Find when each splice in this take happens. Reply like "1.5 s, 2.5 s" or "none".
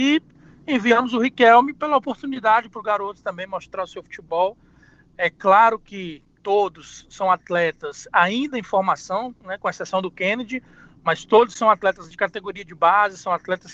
none